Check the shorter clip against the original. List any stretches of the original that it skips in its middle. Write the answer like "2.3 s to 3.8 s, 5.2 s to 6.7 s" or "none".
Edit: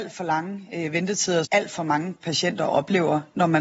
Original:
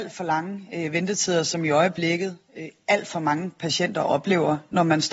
1.4 s to 2.8 s